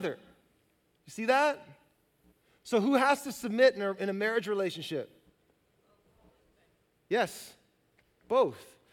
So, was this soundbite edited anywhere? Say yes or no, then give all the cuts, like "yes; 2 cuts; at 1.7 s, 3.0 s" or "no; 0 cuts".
no; 0 cuts